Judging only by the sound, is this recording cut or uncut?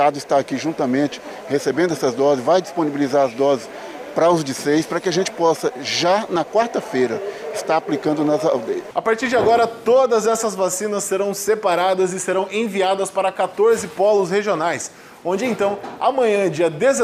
uncut